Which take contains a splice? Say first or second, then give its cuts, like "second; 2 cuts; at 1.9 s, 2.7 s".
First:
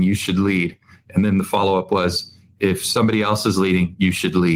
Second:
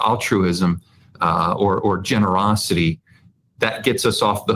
second; 2 cuts; at 1.8 s, 3.5 s